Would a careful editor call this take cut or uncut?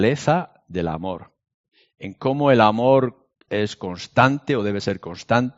cut